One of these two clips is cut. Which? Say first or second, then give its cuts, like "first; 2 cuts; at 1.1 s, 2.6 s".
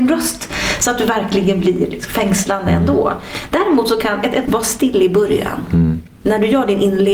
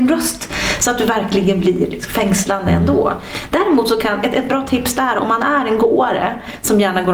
first; 1 cut; at 4.5 s